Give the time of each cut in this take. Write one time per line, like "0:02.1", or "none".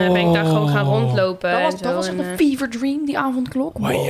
none